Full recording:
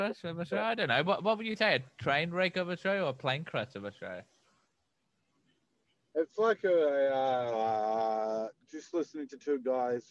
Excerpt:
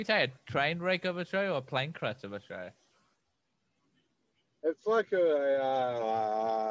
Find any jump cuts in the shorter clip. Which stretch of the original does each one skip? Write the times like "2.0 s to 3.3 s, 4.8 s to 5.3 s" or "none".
none